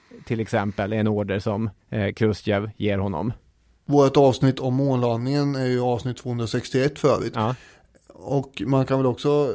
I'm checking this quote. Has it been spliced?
yes; 1 cut; at 1.8 s

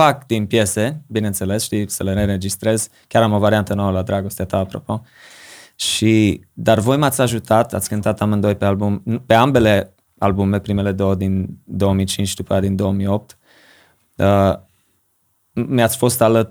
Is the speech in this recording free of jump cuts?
yes; 0 cuts

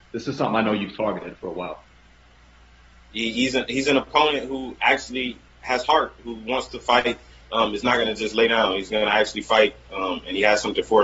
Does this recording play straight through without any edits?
yes; 0 cuts

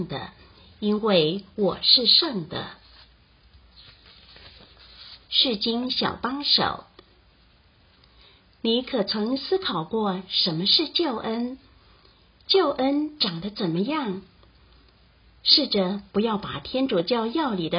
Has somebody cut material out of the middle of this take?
yes; 1 cut; at 5.2 s

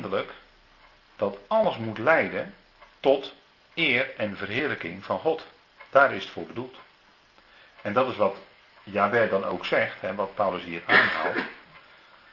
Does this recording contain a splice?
no; 0 cuts

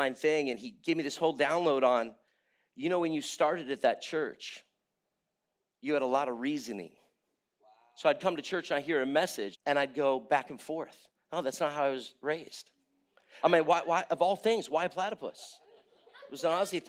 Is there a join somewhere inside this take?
yes; 2 cuts; at 9.5 s, 13.4 s

